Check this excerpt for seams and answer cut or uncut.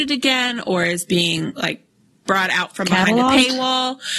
uncut